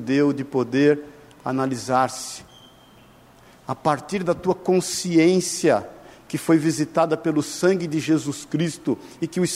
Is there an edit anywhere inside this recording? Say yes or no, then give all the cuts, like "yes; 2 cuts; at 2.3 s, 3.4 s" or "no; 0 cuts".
no; 0 cuts